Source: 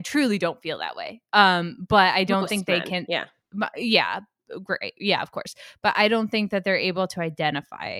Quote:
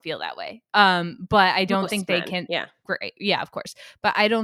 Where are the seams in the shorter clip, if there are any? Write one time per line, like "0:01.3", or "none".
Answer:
0:02.8